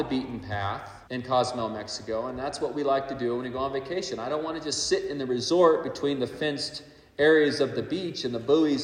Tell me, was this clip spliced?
yes; 1 cut; at 1.1 s

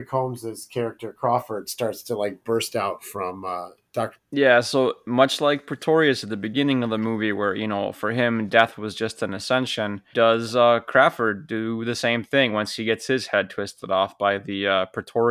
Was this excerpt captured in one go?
no; 2 cuts; at 4.2 s, 10.1 s

